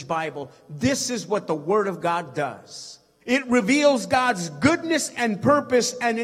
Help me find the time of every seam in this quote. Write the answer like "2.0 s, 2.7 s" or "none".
3.2 s